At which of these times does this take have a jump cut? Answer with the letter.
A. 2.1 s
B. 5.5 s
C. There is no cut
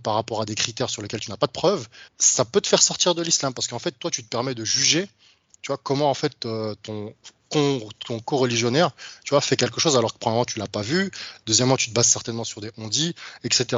A